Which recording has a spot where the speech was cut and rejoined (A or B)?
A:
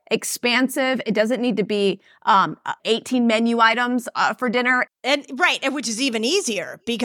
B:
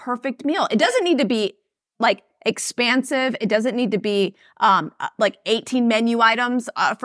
A